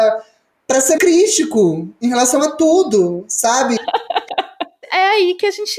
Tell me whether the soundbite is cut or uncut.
cut